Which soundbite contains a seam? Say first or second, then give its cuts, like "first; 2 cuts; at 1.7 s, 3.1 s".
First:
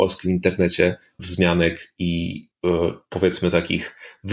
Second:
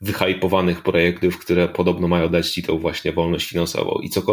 first; 2 cuts; at 1.2 s, 3.1 s